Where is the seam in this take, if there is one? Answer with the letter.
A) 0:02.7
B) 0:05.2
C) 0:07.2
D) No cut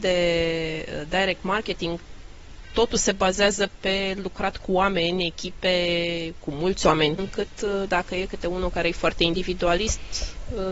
C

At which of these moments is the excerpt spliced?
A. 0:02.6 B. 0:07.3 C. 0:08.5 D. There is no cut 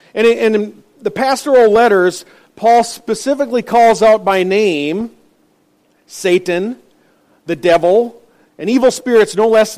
C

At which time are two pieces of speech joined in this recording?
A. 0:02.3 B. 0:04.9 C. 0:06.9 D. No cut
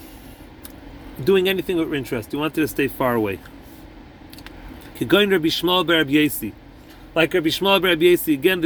B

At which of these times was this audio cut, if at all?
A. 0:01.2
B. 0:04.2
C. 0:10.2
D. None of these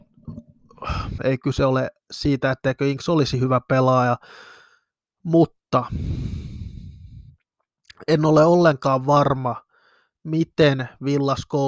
A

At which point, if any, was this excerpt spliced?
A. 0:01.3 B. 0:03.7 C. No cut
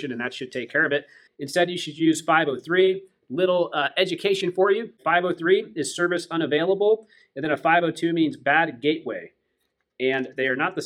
A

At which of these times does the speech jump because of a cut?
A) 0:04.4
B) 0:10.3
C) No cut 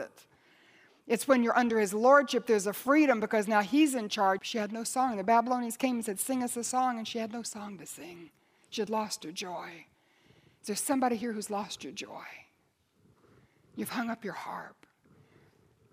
A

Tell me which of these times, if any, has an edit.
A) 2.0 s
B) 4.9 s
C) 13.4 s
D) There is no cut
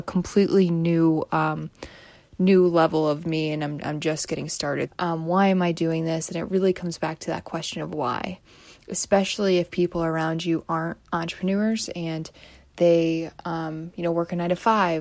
B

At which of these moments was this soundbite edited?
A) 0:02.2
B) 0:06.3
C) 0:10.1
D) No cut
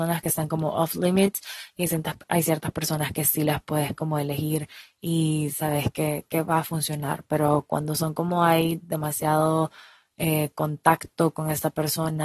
D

